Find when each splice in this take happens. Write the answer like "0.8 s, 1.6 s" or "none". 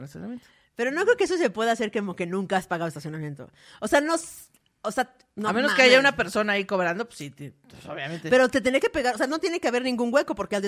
none

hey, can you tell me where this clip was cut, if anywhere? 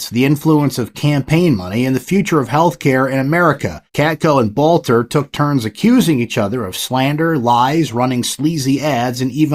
3.9 s

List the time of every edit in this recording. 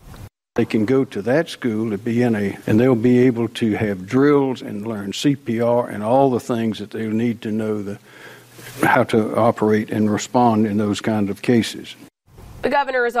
2.6 s

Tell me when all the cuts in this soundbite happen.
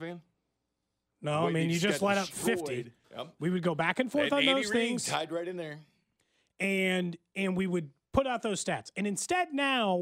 3.0 s

